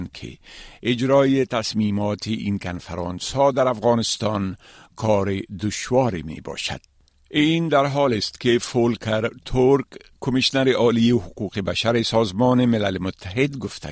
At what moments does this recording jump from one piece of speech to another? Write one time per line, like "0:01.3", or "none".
none